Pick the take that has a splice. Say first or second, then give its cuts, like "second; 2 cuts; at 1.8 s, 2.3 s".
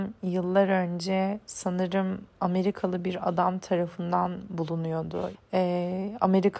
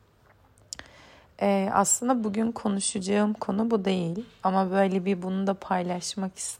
first; 1 cut; at 5.3 s